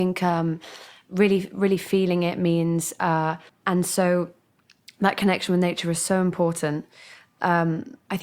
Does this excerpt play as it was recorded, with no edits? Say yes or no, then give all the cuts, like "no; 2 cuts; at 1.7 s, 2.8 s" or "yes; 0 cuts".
no; 1 cut; at 3.5 s